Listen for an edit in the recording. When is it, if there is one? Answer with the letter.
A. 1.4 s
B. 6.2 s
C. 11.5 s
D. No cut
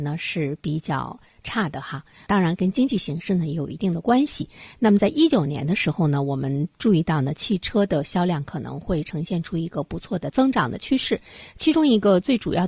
D